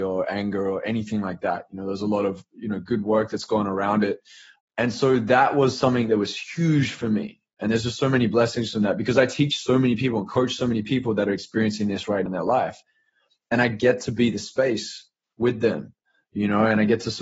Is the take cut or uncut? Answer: cut